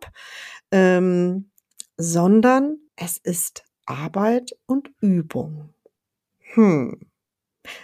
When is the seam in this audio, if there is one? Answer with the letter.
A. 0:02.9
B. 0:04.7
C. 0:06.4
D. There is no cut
A